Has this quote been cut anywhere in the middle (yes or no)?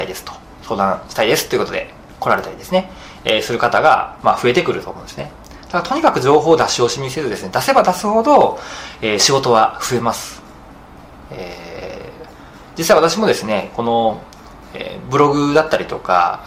no